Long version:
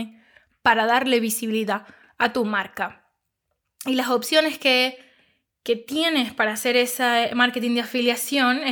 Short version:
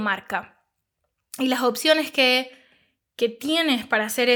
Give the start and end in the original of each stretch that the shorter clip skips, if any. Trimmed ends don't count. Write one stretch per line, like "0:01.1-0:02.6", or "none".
none